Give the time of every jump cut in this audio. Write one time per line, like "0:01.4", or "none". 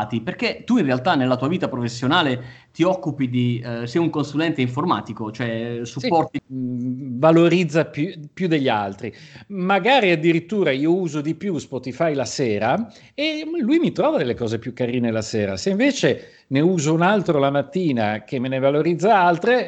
0:06.4